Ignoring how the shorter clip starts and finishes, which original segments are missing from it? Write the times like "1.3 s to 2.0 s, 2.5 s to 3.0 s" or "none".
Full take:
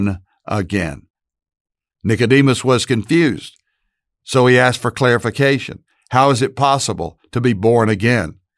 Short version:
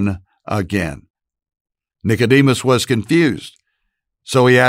none